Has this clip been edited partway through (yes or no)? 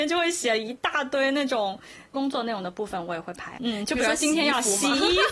yes